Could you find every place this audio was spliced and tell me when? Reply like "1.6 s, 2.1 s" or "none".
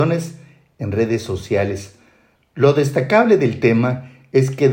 2.4 s